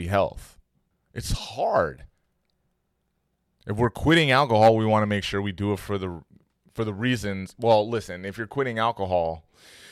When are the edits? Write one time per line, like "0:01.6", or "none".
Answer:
0:00.9